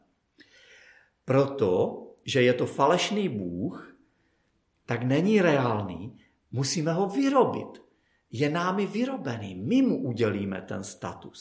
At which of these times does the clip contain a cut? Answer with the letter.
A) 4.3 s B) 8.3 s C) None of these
C